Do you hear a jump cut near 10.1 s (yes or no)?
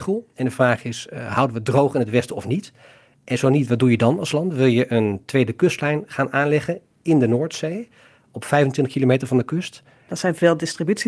yes